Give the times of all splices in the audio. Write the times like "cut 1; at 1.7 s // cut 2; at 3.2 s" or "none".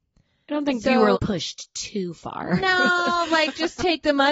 cut 1; at 1.1 s